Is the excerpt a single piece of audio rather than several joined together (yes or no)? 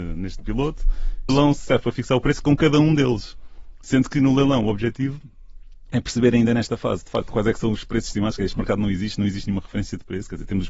no